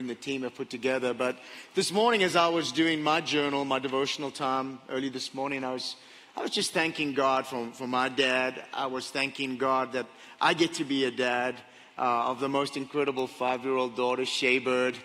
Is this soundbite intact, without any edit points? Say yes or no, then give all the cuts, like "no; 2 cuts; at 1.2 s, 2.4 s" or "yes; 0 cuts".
yes; 0 cuts